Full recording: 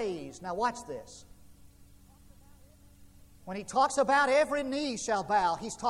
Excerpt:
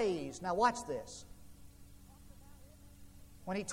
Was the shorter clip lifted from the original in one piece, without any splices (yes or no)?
yes